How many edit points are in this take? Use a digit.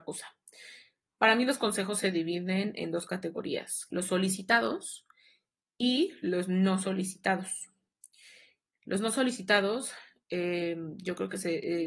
0